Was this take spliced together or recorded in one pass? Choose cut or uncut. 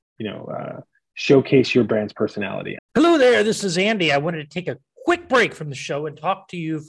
cut